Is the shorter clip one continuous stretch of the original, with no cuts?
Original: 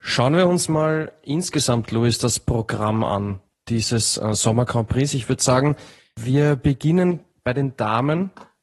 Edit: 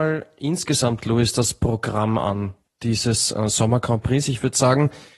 yes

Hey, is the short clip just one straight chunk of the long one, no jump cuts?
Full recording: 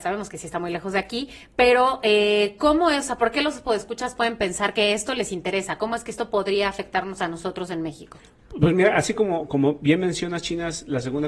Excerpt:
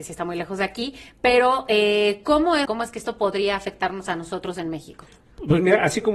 no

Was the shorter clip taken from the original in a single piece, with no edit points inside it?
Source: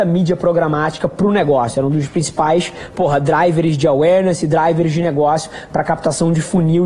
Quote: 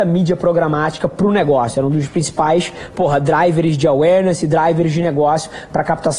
yes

